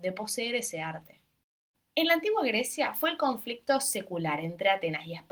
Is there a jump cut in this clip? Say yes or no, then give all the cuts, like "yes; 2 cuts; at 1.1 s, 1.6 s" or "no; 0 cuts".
yes; 1 cut; at 1.7 s